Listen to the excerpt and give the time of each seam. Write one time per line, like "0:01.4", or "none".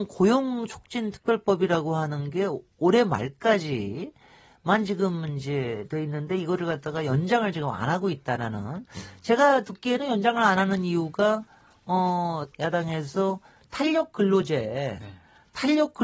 0:12.5

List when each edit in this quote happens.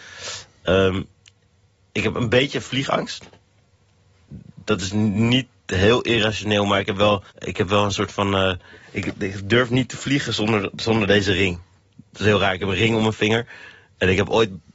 0:07.3

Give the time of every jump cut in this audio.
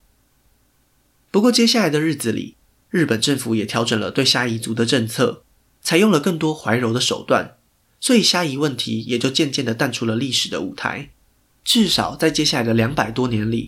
none

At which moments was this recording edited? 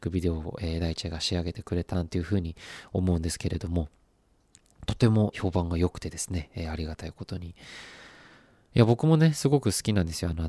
0:01.9
0:05.3

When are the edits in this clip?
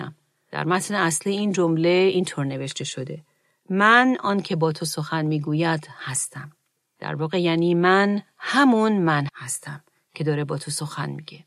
0:09.3

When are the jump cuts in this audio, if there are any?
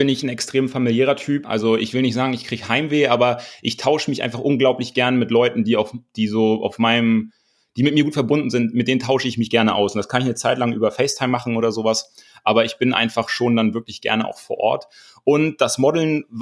0:01.4

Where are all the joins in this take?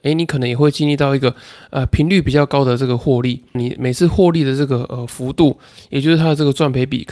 0:03.5

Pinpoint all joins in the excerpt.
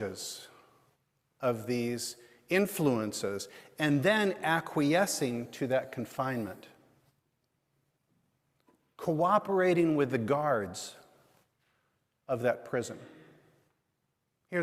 none

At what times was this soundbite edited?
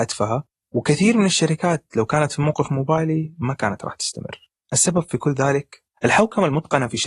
0:05.9

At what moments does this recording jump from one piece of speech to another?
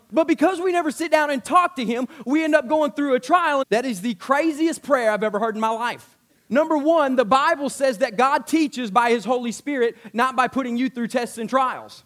0:03.6

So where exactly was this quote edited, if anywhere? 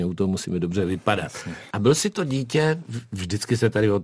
0:01.7

